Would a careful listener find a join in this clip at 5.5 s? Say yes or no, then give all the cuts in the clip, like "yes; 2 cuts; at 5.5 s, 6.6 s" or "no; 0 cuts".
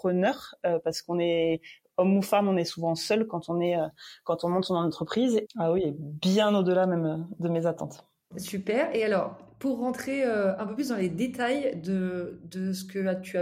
yes; 1 cut; at 5.5 s